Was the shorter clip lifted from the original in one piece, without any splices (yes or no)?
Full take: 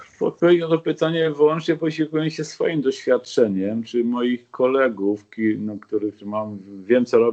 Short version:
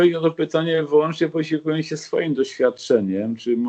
yes